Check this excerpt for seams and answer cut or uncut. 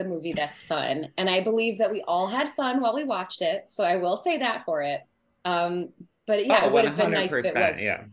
uncut